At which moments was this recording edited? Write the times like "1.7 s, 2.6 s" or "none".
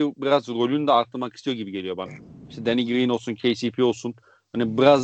2.1 s